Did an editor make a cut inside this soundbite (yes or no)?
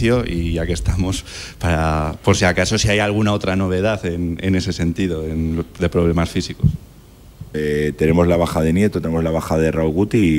yes